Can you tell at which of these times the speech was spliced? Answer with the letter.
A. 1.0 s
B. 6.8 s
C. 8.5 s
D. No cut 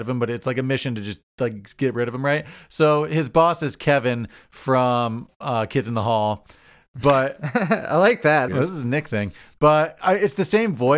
C